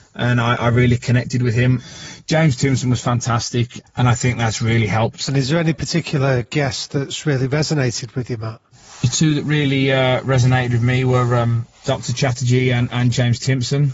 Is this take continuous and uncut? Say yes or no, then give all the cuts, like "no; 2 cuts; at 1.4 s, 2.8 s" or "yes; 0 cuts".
no; 1 cut; at 3.8 s